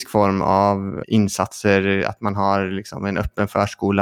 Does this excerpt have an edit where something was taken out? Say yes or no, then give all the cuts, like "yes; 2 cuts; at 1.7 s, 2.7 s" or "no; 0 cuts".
yes; 1 cut; at 1.0 s